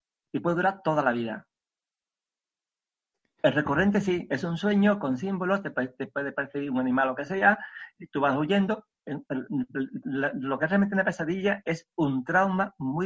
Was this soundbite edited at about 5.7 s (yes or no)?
no